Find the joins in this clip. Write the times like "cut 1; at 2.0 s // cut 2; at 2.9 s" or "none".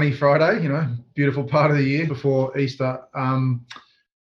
cut 1; at 2.1 s

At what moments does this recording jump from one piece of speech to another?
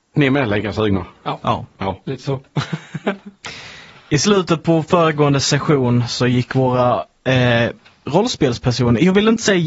none

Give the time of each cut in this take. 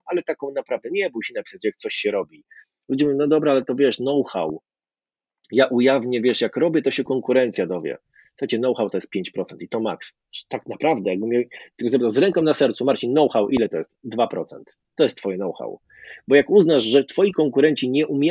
none

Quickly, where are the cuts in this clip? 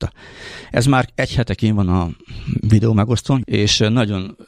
none

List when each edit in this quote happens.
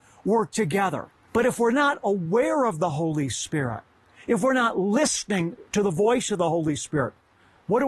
cut 1; at 1.2 s

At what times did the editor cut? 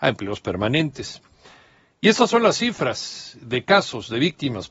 none

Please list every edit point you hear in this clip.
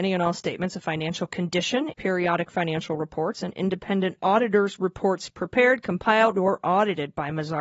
cut 1; at 1.9 s // cut 2; at 6.3 s

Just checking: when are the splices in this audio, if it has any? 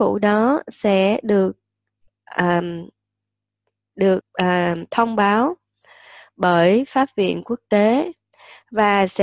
cut 1; at 4.2 s

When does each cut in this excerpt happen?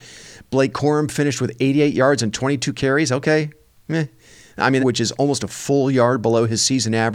cut 1; at 4.8 s

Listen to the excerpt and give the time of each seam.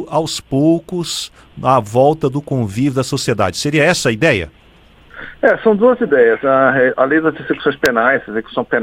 none

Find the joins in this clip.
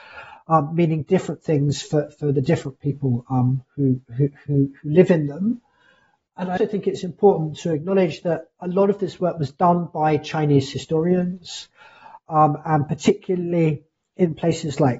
cut 1; at 6.6 s

